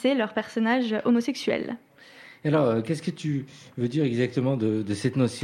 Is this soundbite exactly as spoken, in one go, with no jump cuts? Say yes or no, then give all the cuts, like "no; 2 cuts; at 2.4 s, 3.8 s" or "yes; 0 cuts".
yes; 0 cuts